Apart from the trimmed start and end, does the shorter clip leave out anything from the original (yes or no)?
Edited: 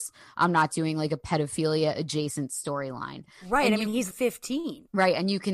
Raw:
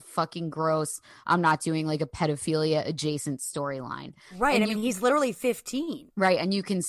yes